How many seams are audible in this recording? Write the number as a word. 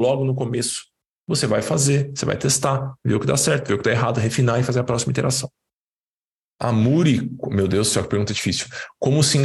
zero